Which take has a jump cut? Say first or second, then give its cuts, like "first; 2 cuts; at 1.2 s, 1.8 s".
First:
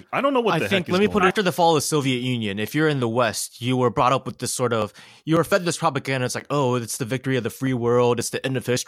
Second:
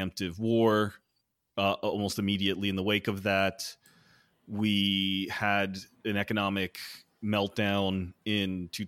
first; 1 cut; at 1.3 s